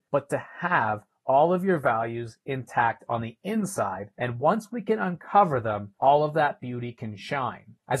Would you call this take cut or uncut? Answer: uncut